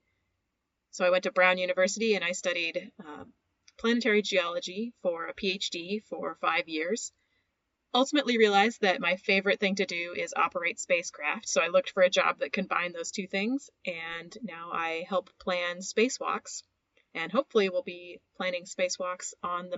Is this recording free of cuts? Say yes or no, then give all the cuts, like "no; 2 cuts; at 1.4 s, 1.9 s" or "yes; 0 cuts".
yes; 0 cuts